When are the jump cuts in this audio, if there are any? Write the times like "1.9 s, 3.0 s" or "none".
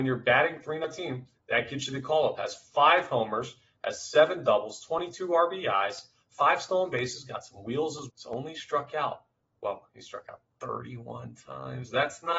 8.1 s